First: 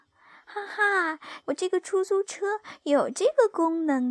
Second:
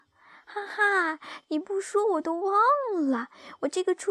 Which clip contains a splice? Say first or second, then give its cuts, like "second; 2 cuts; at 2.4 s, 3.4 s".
first; 1 cut; at 1.4 s